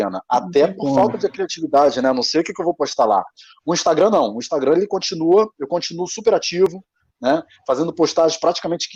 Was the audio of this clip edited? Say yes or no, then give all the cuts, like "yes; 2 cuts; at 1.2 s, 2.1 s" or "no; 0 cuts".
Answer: no; 0 cuts